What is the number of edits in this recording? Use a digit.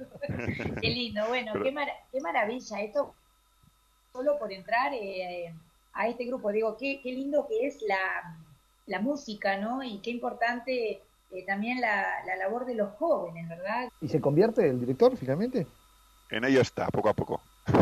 1